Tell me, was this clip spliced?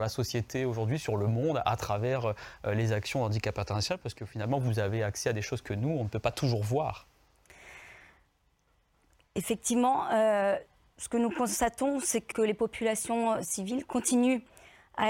yes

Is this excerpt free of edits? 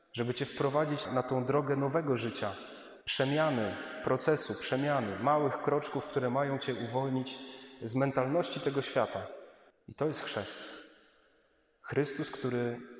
no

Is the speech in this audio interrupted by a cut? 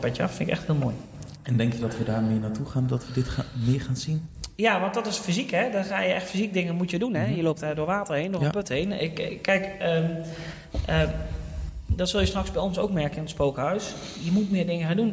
no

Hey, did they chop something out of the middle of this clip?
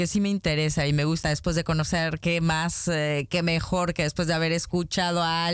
yes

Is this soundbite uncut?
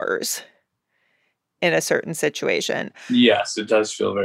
yes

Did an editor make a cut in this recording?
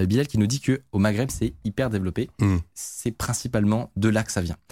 no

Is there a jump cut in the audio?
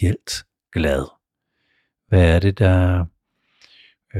no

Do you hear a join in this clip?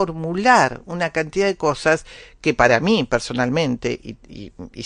no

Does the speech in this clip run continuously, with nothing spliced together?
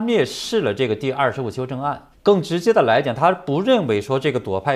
no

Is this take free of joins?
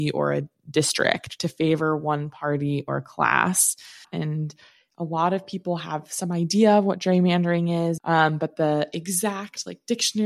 no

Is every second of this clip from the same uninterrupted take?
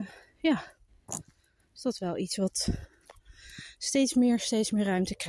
yes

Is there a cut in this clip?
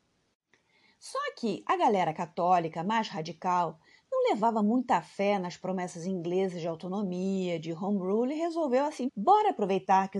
yes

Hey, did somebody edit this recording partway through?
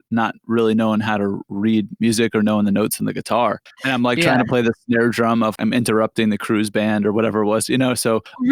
yes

